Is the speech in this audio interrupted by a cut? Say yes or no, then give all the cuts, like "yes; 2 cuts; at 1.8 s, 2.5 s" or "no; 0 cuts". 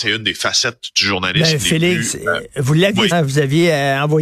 yes; 1 cut; at 3.1 s